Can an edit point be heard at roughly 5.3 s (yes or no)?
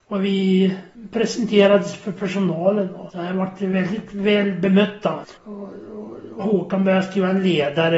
yes